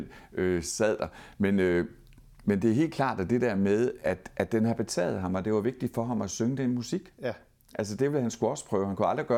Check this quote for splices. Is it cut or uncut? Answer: uncut